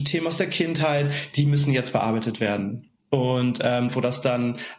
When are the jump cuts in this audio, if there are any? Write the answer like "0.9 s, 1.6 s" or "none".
3.9 s